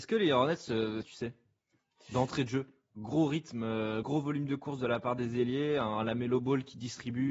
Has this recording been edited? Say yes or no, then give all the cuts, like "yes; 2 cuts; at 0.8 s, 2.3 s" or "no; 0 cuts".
yes; 2 cuts; at 1.0 s, 4.0 s